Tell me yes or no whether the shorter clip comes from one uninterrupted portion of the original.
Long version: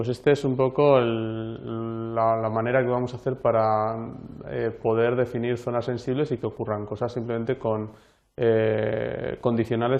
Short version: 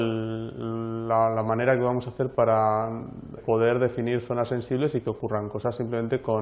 no